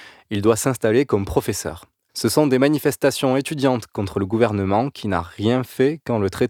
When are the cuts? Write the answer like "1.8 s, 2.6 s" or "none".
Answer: 2.1 s